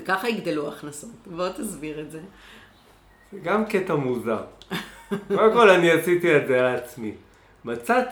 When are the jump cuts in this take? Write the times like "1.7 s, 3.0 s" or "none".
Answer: none